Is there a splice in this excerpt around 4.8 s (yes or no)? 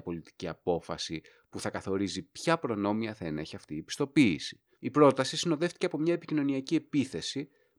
yes